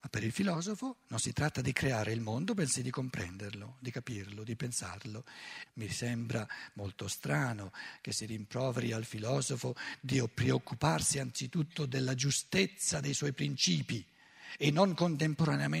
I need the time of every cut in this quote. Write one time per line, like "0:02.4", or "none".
0:05.7